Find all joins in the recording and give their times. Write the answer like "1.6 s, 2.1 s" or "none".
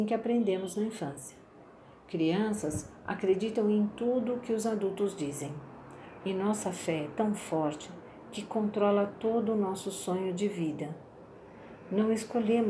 6.2 s

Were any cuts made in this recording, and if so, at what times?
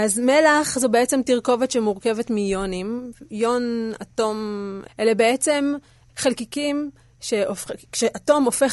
4.9 s, 6.1 s

